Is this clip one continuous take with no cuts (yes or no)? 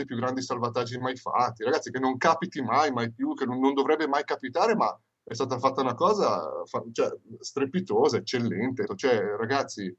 no